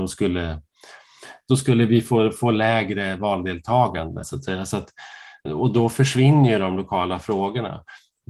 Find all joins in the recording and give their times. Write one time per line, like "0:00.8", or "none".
0:04.2
0:05.5